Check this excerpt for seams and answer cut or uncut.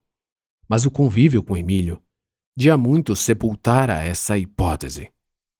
uncut